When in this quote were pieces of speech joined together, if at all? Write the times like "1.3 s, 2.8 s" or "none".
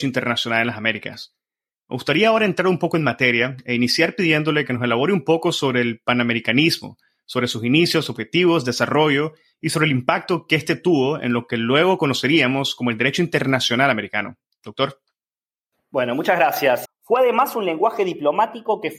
16.8 s

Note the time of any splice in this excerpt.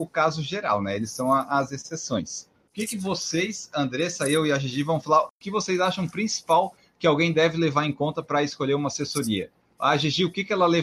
none

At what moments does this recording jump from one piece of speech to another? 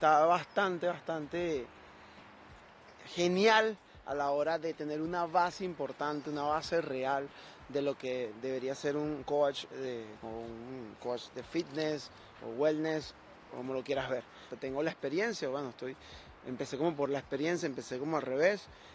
10.2 s, 14.5 s

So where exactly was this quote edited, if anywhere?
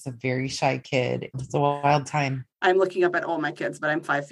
1.3 s, 2.5 s

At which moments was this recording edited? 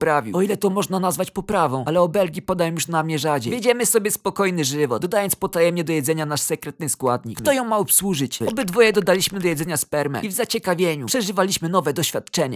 7.3 s, 8.4 s

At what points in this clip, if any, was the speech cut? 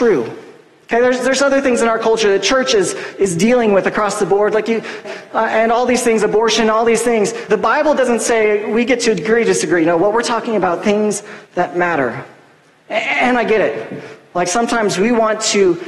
5.0 s, 7.5 s

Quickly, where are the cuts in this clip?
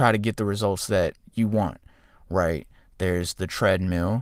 none

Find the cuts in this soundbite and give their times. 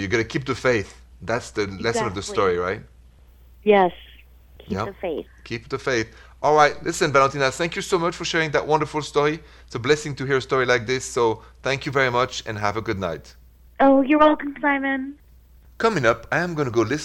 none

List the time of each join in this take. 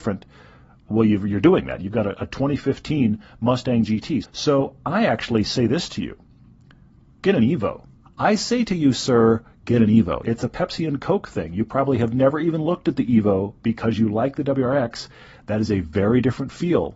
4.2 s, 8.1 s, 10.2 s

